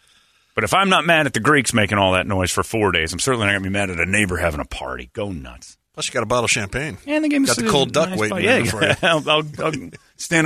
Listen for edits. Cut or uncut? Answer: uncut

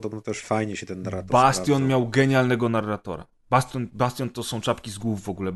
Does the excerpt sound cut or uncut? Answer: uncut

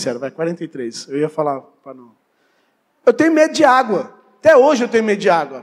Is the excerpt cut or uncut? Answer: uncut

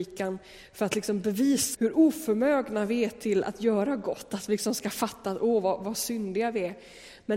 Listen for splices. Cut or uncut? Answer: cut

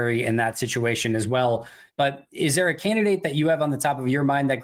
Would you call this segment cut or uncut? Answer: cut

